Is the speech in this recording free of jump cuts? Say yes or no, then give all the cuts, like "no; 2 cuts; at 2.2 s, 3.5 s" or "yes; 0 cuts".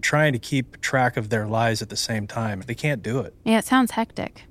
no; 1 cut; at 2.6 s